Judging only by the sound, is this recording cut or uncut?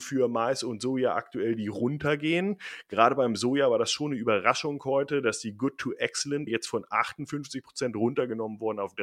cut